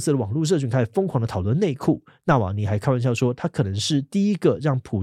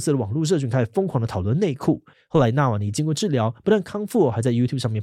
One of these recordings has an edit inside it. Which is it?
second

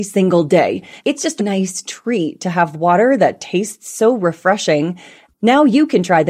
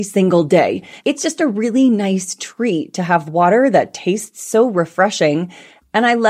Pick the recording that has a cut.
first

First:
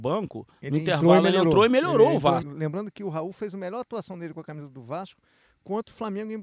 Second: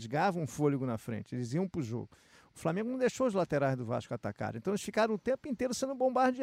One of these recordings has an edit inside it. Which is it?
first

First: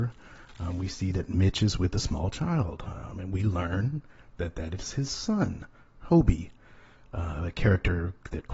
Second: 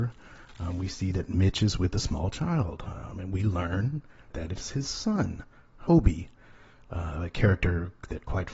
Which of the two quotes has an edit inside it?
second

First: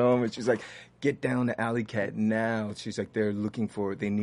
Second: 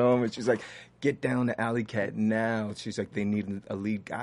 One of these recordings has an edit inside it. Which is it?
second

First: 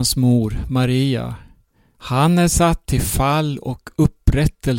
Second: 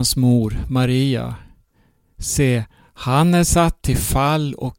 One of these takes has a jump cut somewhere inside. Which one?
first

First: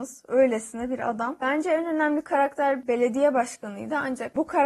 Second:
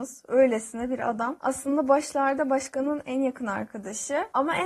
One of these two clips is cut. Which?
first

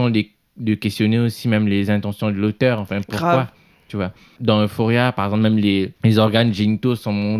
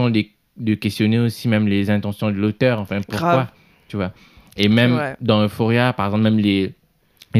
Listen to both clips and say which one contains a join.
first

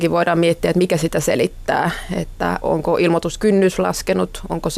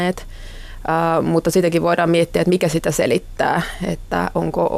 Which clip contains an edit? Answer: first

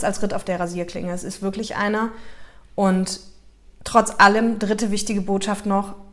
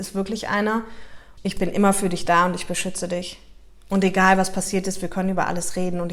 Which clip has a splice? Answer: second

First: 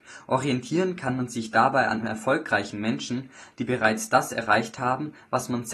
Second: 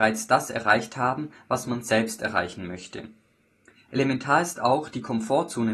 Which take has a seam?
second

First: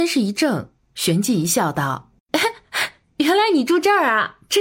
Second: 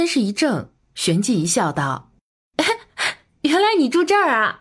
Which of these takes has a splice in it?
first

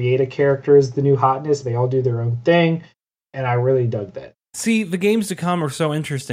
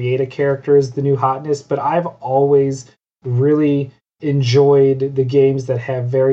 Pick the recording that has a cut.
first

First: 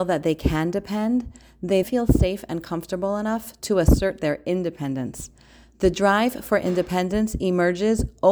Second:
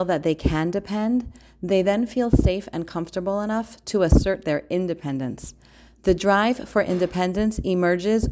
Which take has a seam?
first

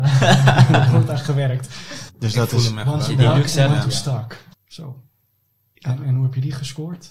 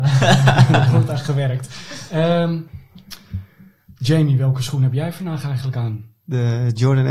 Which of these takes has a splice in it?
first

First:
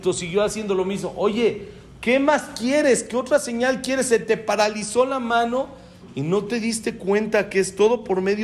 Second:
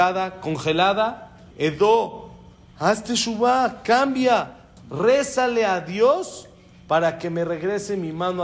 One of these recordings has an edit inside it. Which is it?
second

